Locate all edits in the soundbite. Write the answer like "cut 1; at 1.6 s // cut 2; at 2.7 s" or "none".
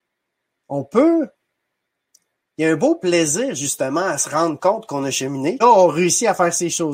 cut 1; at 5.6 s